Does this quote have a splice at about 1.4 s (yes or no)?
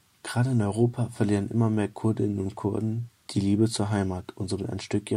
no